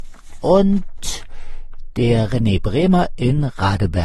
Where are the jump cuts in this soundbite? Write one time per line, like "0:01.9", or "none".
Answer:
none